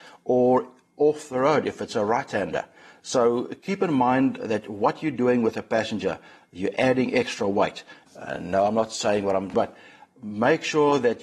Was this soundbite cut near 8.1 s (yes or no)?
yes